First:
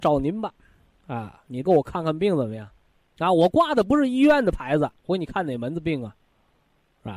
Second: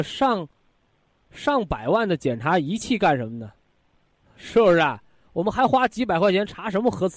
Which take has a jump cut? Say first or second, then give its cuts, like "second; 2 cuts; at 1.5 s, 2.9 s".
first; 2 cuts; at 3.0 s, 5.0 s